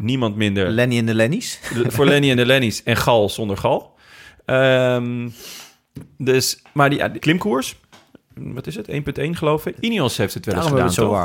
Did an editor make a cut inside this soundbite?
yes; 2 cuts; at 7.2 s, 9.8 s

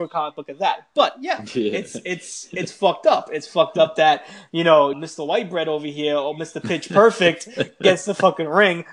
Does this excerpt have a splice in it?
yes; 1 cut; at 4.9 s

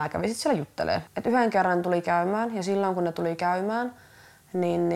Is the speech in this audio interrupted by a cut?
yes; 1 cut; at 1.1 s

